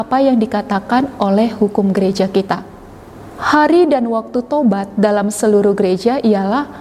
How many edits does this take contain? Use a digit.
1